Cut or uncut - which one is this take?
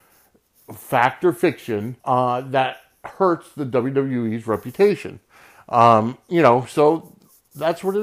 cut